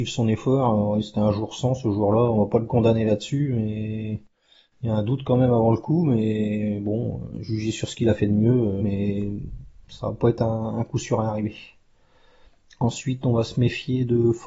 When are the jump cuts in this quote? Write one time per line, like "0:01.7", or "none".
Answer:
0:08.8